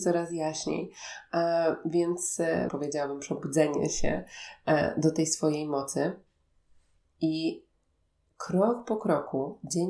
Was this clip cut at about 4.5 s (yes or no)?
no